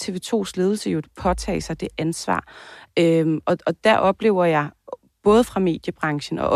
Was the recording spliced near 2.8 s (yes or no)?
no